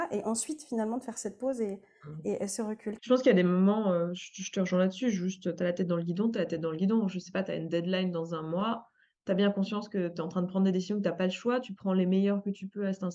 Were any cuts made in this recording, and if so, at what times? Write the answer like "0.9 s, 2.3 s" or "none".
3.0 s